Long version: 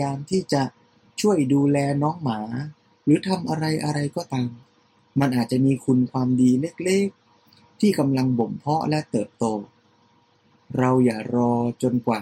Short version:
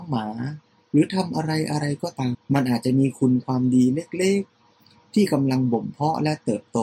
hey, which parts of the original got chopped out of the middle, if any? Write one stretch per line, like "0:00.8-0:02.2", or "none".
0:04.5-0:05.0